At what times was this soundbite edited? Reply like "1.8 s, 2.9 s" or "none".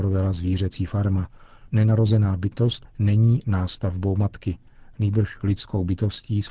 1.7 s, 2.9 s